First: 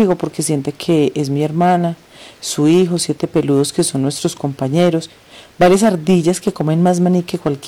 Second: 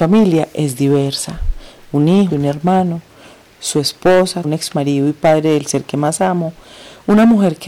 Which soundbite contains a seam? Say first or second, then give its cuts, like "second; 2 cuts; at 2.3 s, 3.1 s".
second; 2 cuts; at 2.3 s, 4.4 s